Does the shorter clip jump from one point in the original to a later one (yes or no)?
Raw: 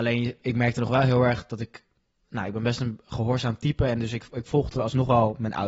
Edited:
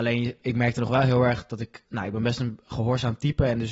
yes